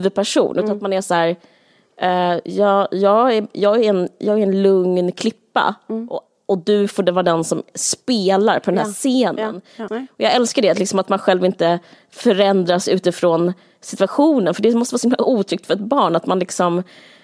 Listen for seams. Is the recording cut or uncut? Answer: cut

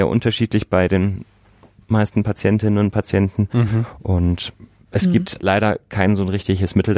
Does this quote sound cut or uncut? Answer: uncut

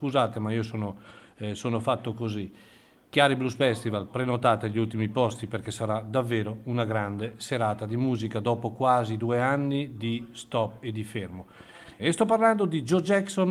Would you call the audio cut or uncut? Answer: cut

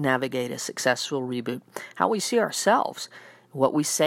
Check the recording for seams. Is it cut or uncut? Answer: uncut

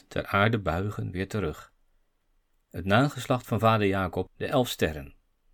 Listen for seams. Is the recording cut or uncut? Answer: cut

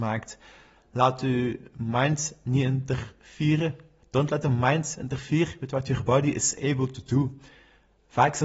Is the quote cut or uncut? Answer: uncut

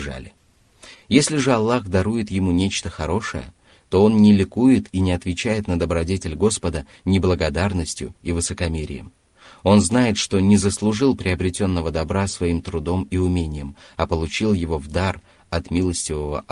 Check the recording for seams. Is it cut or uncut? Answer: cut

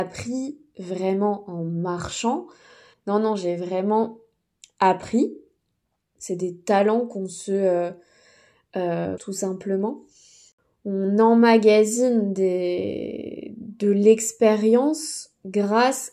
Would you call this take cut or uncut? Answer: cut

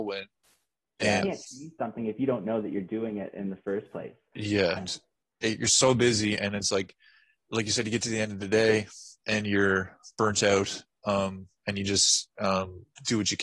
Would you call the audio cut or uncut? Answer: cut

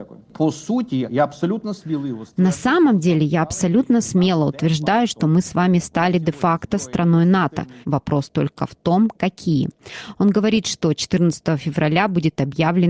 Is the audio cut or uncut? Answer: cut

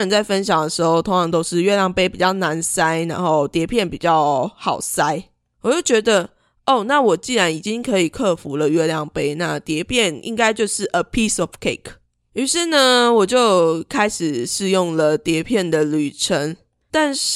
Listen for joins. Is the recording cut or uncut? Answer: uncut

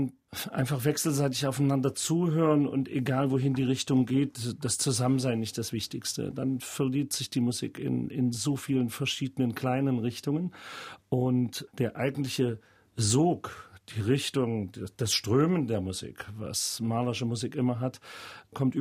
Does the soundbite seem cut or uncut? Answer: uncut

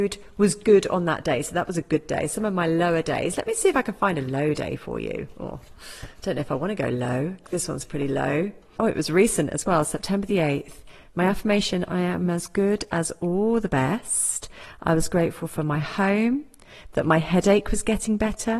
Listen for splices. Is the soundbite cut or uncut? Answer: cut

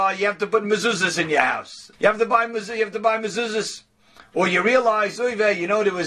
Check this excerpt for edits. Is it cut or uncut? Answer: cut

